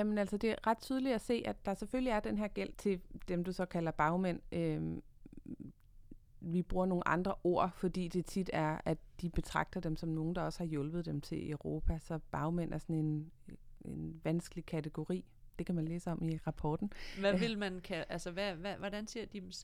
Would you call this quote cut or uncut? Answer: cut